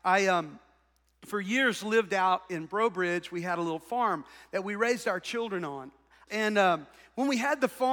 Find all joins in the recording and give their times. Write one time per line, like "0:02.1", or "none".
0:06.3